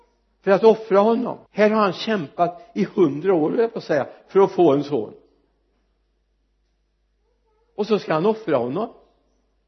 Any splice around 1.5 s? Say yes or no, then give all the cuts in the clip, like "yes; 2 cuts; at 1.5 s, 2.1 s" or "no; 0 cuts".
yes; 1 cut; at 1.5 s